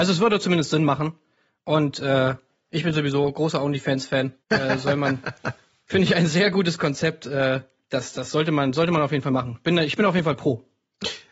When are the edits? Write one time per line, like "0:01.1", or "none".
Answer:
0:04.4